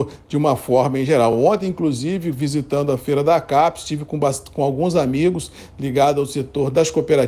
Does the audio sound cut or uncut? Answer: uncut